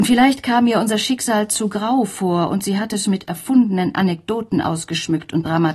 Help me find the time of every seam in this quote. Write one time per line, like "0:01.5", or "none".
none